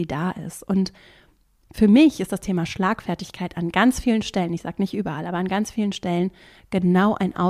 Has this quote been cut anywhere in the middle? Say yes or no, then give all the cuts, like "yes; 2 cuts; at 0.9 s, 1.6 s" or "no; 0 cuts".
no; 0 cuts